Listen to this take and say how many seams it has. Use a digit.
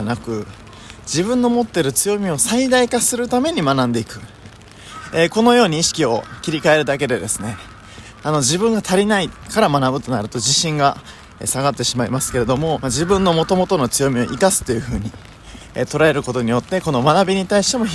1